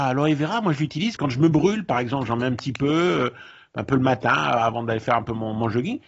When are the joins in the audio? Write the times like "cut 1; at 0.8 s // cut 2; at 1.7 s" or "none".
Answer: cut 1; at 1.2 s